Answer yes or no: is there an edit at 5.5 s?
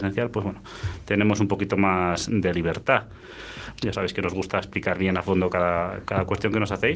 no